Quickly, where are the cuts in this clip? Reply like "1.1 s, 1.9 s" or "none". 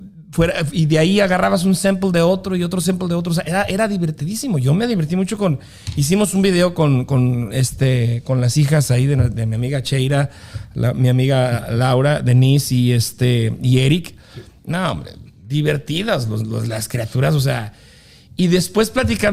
none